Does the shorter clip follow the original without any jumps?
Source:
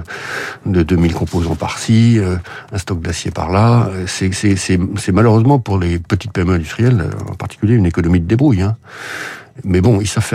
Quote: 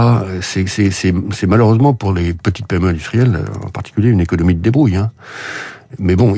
yes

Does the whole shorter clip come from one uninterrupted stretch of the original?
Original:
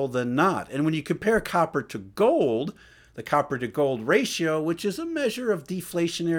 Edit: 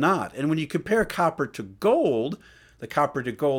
yes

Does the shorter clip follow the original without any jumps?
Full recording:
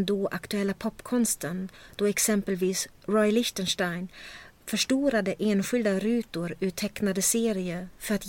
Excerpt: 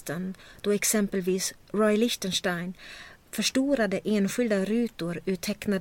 yes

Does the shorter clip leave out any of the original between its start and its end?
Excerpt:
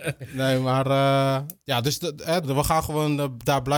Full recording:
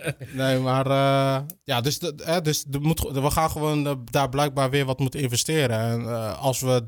yes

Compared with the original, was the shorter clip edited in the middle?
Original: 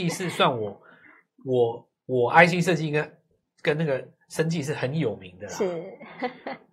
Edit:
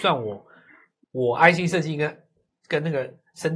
yes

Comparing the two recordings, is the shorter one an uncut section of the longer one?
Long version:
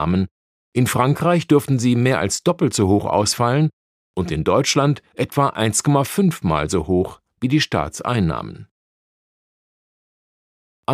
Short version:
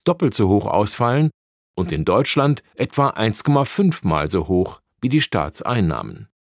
yes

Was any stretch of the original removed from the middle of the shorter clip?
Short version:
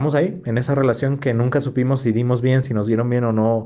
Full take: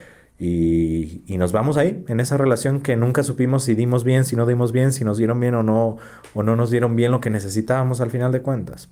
yes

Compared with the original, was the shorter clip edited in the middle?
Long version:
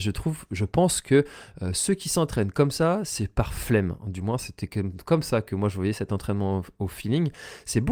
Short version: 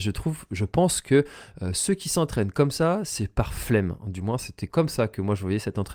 yes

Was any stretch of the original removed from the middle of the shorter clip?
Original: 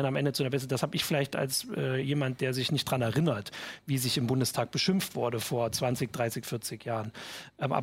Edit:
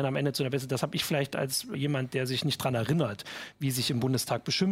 yes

